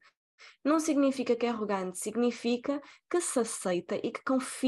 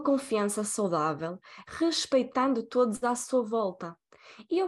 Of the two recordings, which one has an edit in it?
second; 1 cut; at 1.6 s

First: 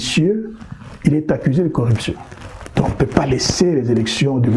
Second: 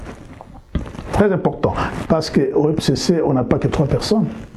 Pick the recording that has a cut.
second; 1 cut; at 2.0 s

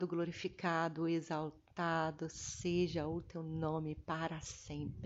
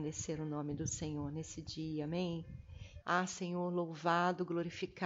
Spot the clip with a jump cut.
second; 1 cut; at 3.0 s

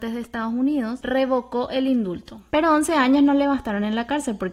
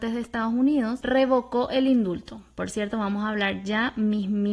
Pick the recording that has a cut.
first; 1 cut; at 2.5 s

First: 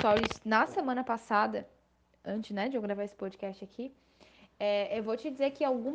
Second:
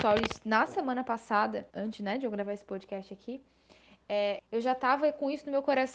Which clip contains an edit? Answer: second; 2 cuts; at 1.7 s, 4.4 s

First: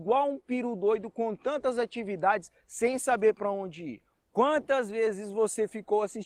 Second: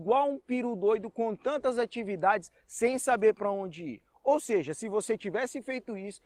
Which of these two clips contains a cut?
first; 1 cut; at 4.1 s

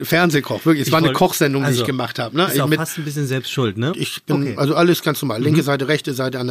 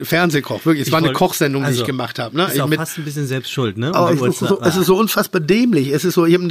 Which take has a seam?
first; 1 cut; at 3.9 s

